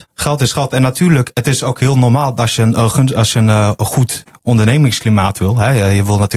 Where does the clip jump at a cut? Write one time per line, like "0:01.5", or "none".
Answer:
none